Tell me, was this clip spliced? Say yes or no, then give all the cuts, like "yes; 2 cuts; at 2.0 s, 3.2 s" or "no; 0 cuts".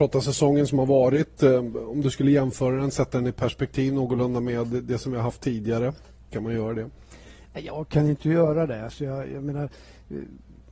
no; 0 cuts